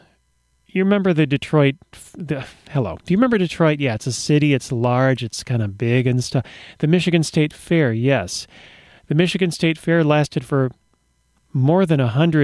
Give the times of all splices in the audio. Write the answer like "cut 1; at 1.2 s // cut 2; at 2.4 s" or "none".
none